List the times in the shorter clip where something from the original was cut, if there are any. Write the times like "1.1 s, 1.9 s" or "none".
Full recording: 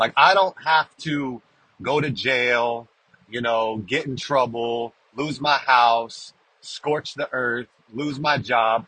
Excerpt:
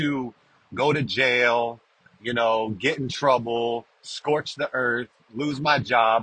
3.9 s